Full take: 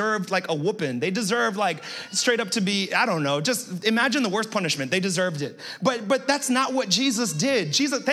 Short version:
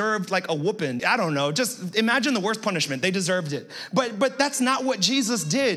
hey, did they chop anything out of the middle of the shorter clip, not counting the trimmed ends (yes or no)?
yes